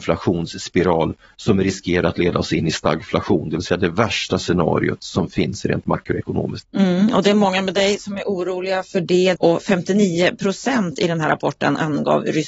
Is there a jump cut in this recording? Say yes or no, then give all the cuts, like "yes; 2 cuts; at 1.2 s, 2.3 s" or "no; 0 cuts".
yes; 2 cuts; at 6.6 s, 9.4 s